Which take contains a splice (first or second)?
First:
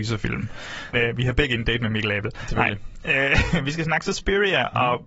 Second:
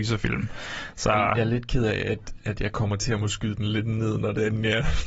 first